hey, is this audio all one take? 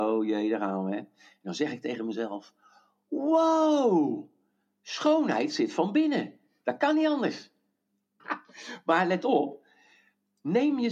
no; 1 cut; at 8.2 s

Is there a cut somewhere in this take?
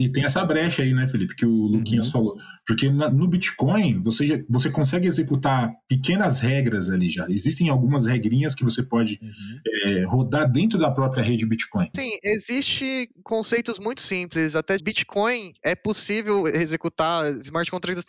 yes; 2 cuts; at 11.9 s, 14.8 s

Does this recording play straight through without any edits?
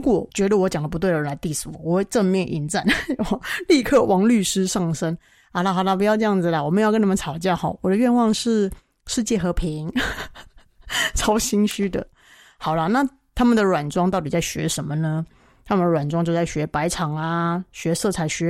yes; 0 cuts

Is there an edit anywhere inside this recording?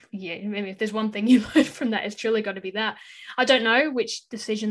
no; 0 cuts

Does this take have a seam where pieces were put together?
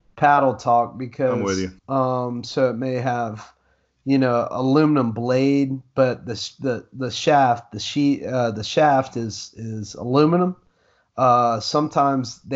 yes; 1 cut; at 1.8 s

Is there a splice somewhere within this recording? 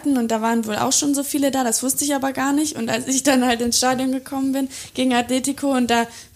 no; 0 cuts

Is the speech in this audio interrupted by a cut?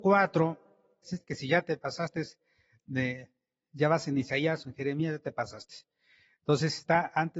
yes; 1 cut; at 1.0 s

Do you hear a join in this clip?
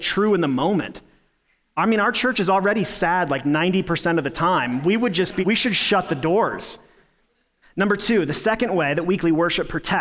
yes; 2 cuts; at 5.4 s, 7.6 s

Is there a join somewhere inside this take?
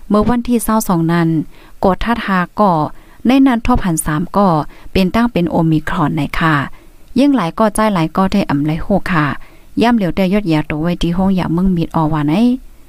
no; 0 cuts

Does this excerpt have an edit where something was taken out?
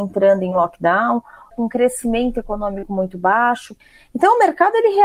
yes; 1 cut; at 1.5 s

